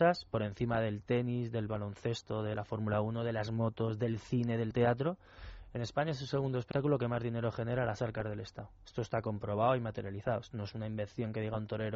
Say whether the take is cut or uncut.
uncut